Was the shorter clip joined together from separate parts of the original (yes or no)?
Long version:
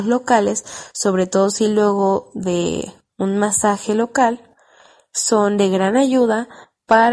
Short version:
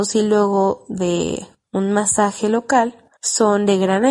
yes